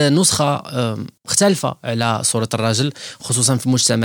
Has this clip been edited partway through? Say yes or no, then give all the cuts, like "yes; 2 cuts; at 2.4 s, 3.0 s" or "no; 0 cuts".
yes; 1 cut; at 1.2 s